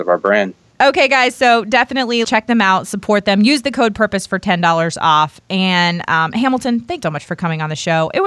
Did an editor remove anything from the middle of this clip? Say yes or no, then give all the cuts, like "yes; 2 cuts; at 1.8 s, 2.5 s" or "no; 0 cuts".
yes; 2 cuts; at 2.2 s, 7.0 s